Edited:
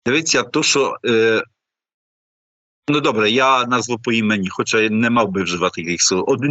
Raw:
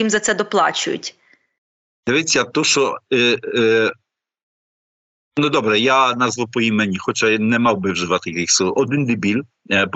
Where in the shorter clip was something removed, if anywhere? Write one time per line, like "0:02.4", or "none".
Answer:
0:01.0